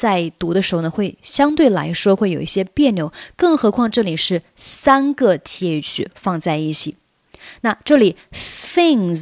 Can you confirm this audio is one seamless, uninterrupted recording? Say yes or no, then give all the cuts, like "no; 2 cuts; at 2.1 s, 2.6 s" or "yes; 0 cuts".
yes; 0 cuts